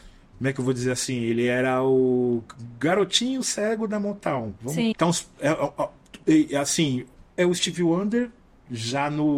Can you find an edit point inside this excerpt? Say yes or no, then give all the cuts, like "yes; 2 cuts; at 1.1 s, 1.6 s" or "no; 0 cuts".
yes; 1 cut; at 4.9 s